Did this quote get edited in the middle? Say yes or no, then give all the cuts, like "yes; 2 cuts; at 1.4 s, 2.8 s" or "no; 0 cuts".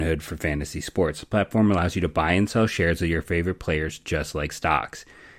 no; 0 cuts